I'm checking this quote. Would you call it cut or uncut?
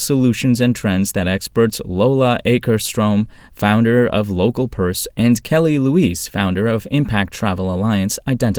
uncut